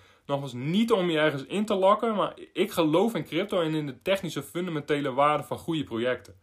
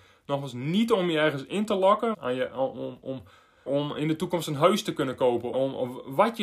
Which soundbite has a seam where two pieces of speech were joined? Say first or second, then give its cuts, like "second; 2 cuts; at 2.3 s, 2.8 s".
second; 3 cuts; at 2.1 s, 3.7 s, 5.5 s